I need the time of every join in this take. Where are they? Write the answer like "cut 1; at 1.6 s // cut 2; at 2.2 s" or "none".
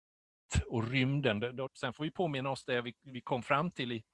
cut 1; at 1.7 s